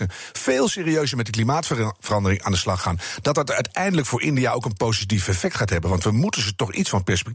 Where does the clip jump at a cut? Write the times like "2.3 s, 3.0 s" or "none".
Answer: none